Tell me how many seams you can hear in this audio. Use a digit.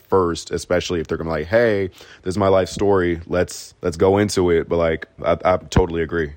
2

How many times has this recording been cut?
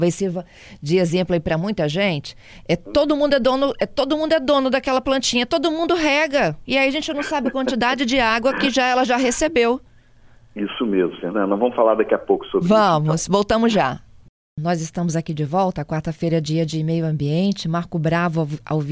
0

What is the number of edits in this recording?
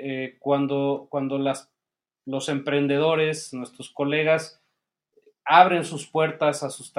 0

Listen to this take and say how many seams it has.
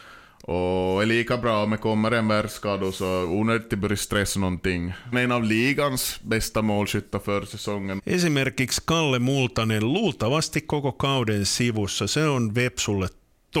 2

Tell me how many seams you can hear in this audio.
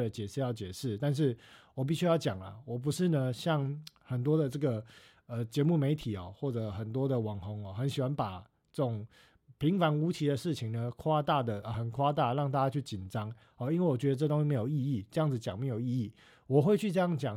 1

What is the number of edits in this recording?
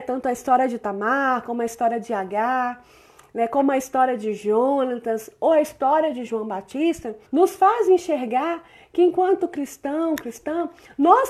1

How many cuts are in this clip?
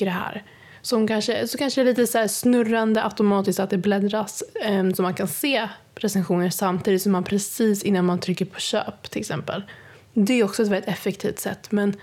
0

